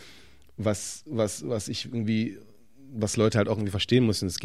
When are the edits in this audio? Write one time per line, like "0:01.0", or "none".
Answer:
none